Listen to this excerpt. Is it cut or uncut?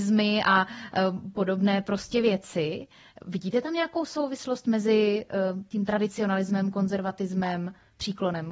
uncut